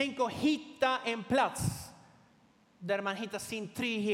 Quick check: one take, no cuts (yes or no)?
yes